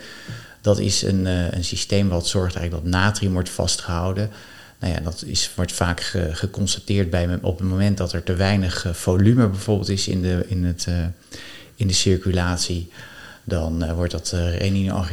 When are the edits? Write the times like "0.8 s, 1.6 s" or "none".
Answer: none